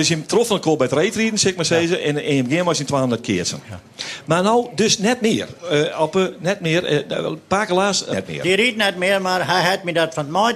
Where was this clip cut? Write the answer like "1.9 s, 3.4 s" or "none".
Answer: 8.1 s

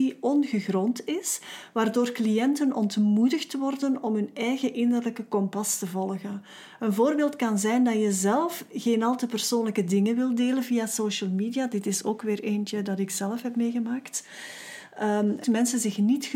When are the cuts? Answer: 15.4 s

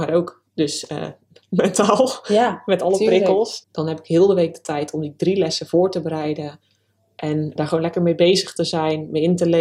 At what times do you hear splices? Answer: 3.6 s, 7.6 s

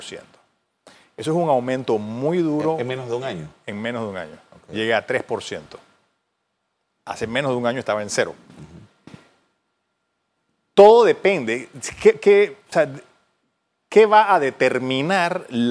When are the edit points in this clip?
none

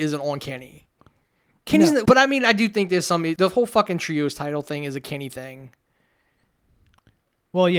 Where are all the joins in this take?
2.1 s, 3.4 s

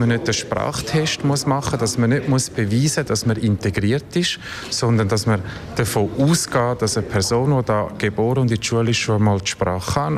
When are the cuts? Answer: none

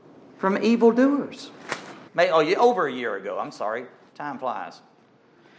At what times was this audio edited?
2.1 s

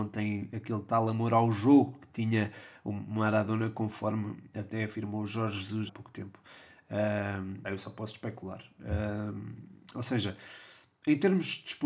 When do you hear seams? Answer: 5.9 s, 7.6 s

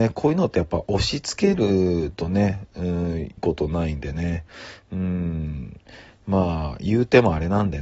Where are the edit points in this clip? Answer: 3.4 s

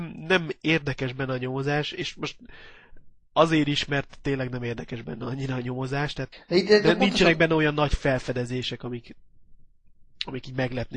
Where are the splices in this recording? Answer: none

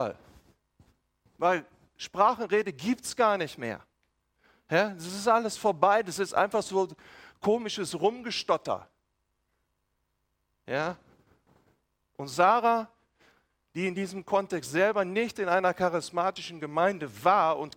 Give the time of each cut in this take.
none

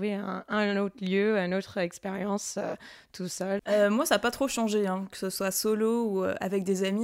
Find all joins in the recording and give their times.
3.6 s

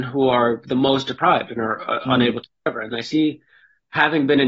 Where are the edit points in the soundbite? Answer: none

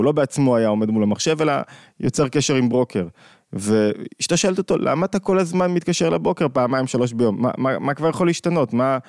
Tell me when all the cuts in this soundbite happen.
none

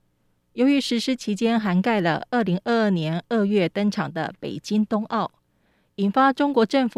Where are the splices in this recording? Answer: none

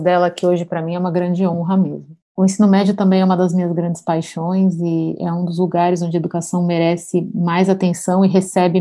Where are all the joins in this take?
none

